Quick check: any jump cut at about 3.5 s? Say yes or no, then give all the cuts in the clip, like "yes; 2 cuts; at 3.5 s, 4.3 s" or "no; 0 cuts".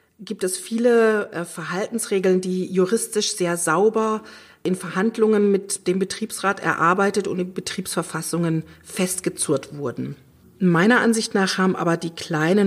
no; 1 cut; at 10.4 s